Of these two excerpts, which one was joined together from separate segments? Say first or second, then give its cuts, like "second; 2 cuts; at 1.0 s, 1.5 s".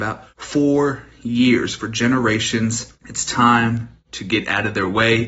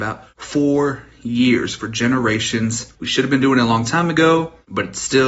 second; 1 cut; at 2.9 s